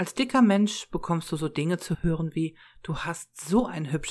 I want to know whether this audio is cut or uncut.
uncut